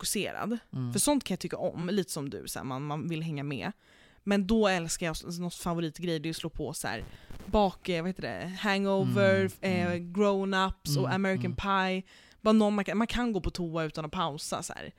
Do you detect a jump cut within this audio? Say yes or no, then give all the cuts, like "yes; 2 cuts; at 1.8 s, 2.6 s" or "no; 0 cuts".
no; 0 cuts